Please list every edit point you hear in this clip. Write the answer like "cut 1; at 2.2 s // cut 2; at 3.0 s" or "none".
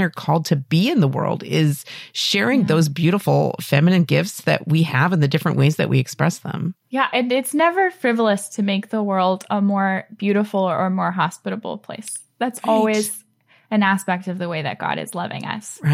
none